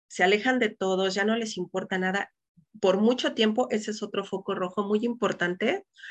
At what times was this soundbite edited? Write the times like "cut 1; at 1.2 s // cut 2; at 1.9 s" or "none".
none